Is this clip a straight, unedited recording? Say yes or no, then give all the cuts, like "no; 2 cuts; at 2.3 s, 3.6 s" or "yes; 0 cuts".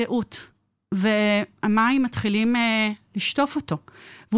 yes; 0 cuts